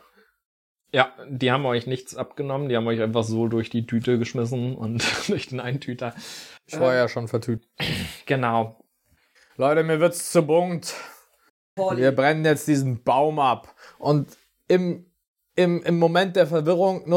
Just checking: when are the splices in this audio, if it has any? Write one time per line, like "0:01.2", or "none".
none